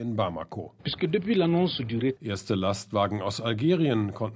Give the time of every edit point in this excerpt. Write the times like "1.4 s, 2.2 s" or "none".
2.2 s